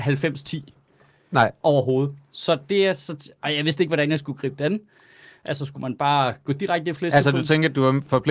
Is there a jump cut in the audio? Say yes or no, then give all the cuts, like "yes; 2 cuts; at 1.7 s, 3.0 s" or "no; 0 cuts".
no; 0 cuts